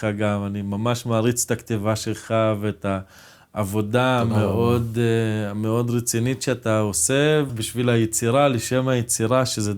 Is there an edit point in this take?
yes; 1 cut; at 7.5 s

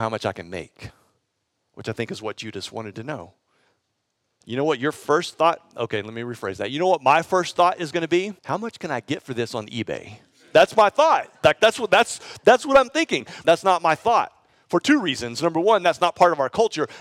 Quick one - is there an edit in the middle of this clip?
yes; 3 cuts; at 4.4 s, 8.4 s, 13.4 s

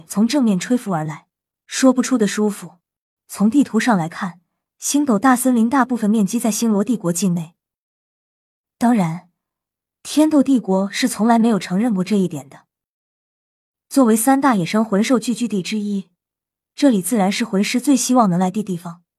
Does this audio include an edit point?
yes; 2 cuts; at 1.5 s, 3.2 s

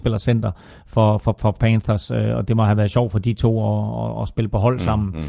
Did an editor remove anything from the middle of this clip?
no; 0 cuts

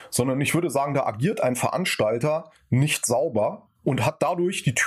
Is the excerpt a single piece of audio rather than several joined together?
no; 1 cut; at 3.7 s

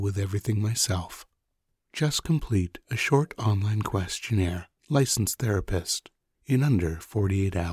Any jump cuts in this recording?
yes; 2 cuts; at 1.8 s, 4.8 s

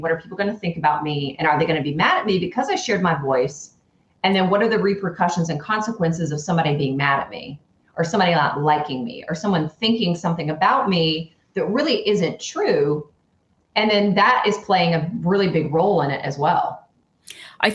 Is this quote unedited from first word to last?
yes; 0 cuts

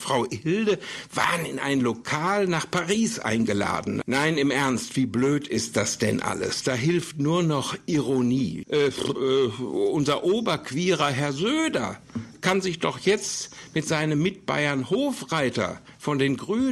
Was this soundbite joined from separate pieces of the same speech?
yes; 2 cuts; at 4.0 s, 8.6 s

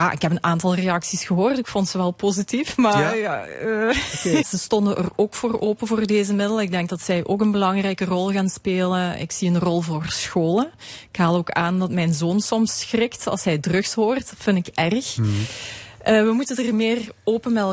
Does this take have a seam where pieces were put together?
yes; 1 cut; at 4.4 s

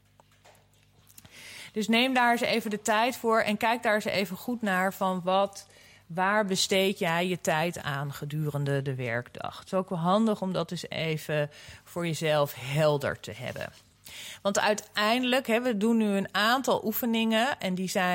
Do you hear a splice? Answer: no; 0 cuts

